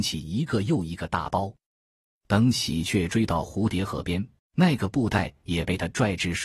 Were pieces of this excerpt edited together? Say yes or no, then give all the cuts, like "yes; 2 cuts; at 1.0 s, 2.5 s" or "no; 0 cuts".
yes; 2 cuts; at 2.1 s, 4.4 s